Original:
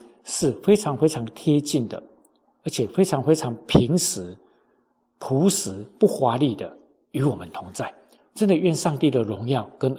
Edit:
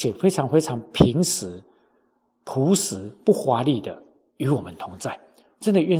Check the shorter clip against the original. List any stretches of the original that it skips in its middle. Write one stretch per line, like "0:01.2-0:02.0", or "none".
none